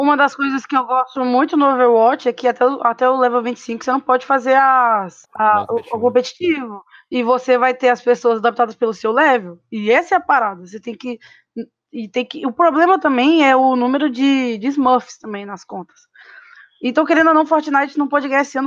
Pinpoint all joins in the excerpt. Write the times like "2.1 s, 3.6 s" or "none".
5.2 s